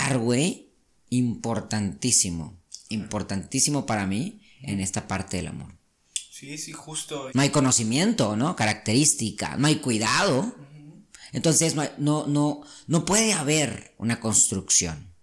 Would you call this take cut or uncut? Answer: cut